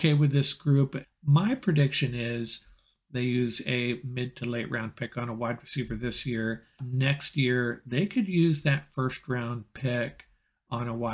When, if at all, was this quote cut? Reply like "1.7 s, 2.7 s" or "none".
1.0 s